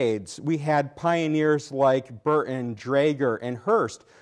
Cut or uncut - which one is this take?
uncut